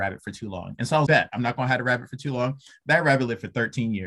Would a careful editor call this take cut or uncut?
cut